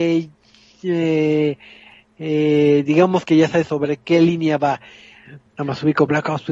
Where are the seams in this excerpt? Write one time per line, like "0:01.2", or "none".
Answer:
0:05.5